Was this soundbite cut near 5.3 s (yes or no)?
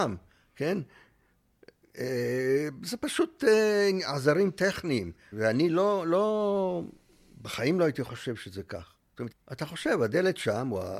yes